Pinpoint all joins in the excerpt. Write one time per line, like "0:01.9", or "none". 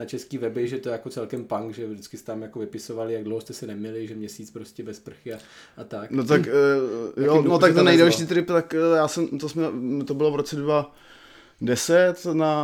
none